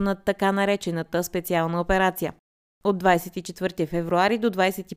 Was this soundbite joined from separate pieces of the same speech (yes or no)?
no